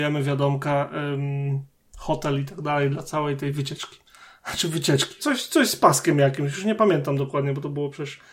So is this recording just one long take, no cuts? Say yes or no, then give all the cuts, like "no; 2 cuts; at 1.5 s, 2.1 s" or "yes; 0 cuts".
no; 1 cut; at 5.2 s